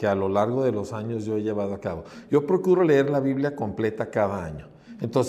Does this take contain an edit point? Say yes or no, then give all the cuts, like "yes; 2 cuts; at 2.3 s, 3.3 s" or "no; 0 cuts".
no; 0 cuts